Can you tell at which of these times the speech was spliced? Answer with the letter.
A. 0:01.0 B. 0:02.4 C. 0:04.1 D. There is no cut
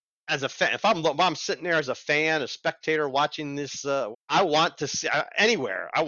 C